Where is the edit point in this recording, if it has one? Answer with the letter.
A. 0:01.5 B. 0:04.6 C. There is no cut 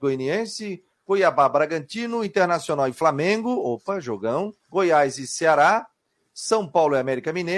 B